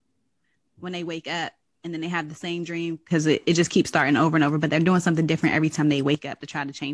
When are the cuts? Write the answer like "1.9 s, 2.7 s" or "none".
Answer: none